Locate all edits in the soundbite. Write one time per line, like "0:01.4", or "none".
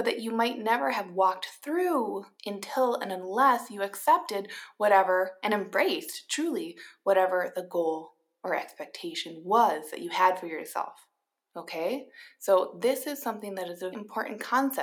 0:02.3
0:11.5
0:13.9